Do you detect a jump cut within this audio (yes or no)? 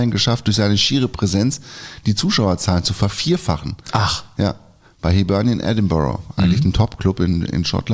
no